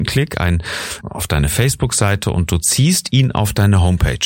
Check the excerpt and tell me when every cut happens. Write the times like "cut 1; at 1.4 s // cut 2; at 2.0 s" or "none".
cut 1; at 1.0 s